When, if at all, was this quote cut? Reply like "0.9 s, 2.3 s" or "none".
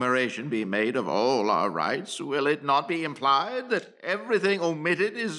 none